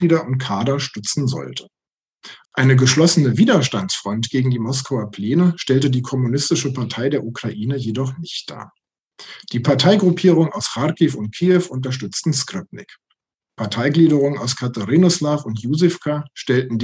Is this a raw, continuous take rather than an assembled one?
no; 1 cut; at 2.4 s

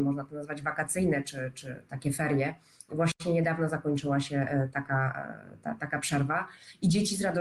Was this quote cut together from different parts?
no; 0 cuts

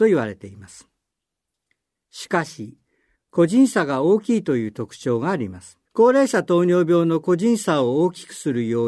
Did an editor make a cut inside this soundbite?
yes; 2 cuts; at 3.2 s, 5.9 s

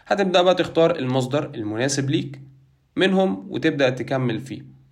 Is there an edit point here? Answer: no; 0 cuts

